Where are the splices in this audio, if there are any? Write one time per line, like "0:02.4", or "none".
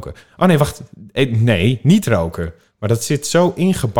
0:02.7